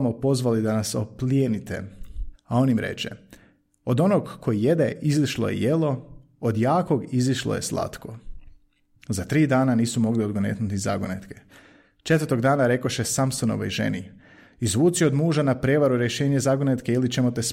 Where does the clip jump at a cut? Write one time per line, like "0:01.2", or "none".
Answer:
0:02.3